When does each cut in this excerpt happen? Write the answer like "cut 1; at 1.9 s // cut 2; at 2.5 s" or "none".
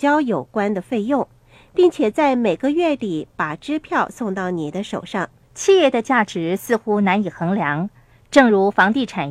cut 1; at 5.4 s